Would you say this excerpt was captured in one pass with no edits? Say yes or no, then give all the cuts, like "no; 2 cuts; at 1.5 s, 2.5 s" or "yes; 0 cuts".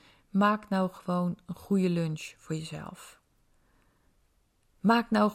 yes; 0 cuts